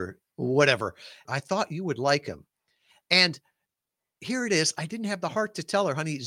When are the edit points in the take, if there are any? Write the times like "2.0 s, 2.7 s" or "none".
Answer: 1.2 s